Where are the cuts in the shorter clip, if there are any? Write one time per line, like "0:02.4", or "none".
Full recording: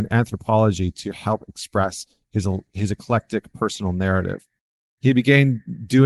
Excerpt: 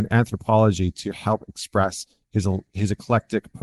none